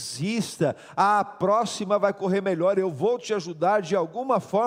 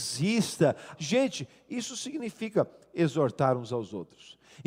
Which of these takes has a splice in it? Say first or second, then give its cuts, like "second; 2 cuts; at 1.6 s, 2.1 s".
second; 1 cut; at 0.9 s